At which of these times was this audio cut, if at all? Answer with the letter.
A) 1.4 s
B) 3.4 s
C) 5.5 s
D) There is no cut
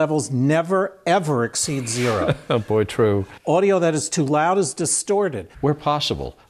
C